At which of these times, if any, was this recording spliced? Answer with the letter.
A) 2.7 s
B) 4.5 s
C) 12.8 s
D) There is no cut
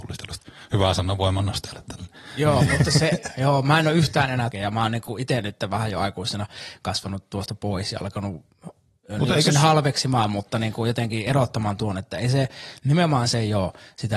B